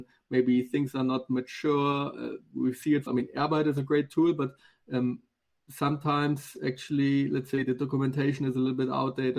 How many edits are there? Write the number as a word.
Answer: one